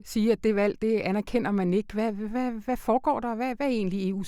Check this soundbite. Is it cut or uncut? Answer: uncut